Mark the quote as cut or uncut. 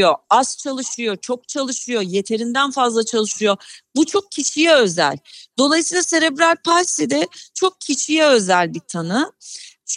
uncut